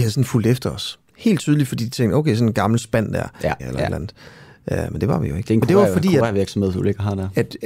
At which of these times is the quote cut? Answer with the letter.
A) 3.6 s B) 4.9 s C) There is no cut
A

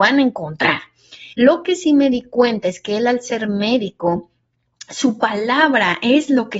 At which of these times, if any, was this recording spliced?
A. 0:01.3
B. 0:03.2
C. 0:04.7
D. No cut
A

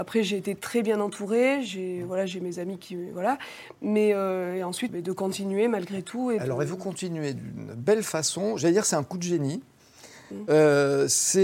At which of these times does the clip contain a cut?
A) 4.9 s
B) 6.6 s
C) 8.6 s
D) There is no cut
A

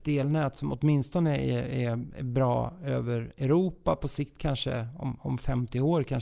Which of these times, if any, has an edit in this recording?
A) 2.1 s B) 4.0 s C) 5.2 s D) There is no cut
D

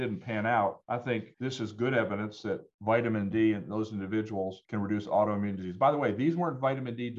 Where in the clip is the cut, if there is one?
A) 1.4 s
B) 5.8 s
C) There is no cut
C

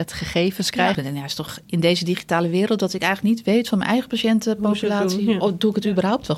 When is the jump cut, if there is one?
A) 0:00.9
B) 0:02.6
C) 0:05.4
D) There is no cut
A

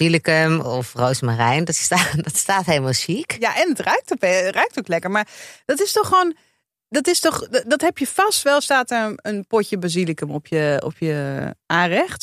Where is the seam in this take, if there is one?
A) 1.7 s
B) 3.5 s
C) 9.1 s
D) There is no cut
D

